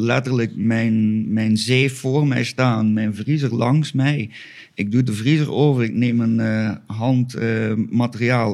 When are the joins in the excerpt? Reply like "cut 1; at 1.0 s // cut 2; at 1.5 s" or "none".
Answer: none